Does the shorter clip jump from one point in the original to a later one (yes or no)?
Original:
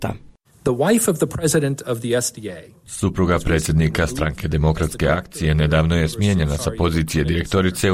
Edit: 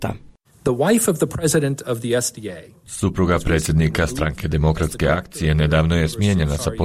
no